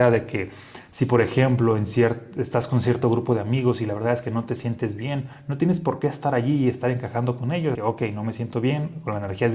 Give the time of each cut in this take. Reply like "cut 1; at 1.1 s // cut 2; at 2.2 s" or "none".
cut 1; at 7.8 s